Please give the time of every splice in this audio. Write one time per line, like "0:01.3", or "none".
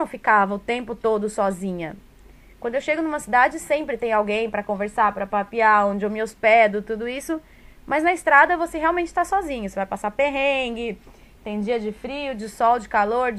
none